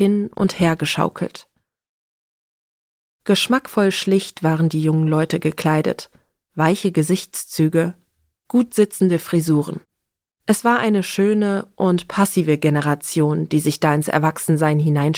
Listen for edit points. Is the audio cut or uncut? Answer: uncut